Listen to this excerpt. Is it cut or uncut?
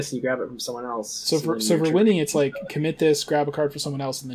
uncut